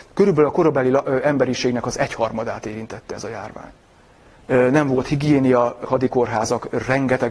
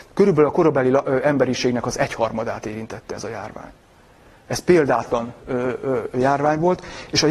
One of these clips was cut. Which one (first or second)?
first